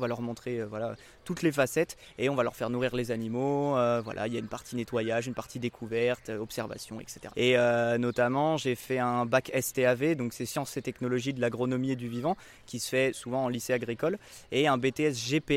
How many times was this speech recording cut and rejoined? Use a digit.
1